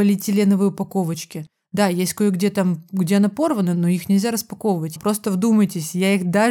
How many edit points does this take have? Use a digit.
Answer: 1